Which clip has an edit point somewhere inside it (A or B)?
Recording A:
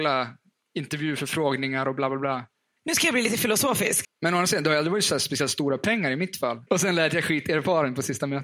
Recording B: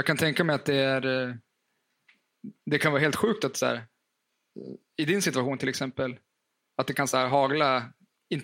A